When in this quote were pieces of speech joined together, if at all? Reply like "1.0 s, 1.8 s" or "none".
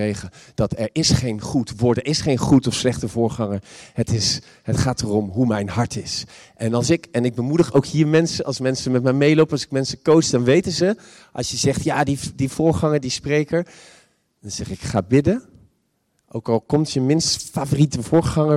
none